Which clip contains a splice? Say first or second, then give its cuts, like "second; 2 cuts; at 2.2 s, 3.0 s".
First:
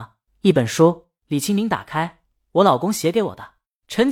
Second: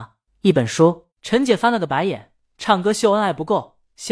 second; 1 cut; at 1.1 s